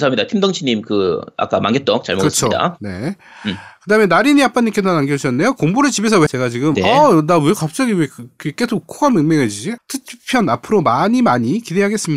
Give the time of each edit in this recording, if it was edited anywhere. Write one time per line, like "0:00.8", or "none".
0:06.3
0:09.8